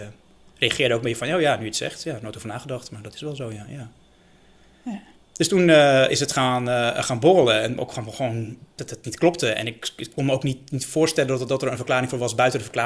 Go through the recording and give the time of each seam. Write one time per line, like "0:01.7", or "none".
none